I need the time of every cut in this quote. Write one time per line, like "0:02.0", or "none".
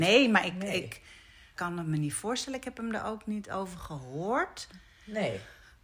0:01.6